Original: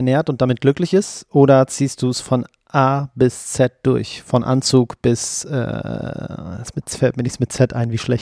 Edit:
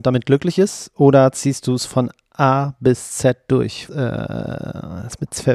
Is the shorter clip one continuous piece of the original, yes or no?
no